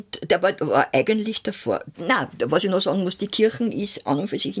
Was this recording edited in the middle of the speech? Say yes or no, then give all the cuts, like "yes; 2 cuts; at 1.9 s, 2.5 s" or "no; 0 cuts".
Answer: yes; 1 cut; at 1.9 s